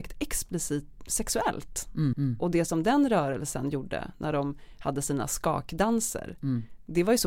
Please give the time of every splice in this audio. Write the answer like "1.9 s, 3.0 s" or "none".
1.0 s, 2.1 s